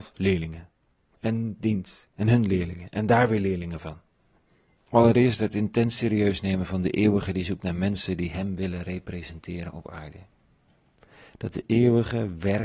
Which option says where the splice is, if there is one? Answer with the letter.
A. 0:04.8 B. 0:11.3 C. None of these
A